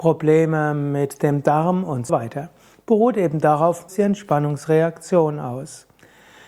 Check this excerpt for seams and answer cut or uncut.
cut